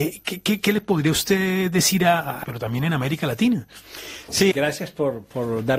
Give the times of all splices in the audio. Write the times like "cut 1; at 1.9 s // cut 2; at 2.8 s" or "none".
cut 1; at 2.4 s // cut 2; at 4.5 s